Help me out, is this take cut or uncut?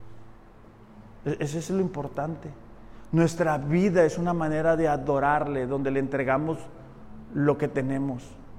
uncut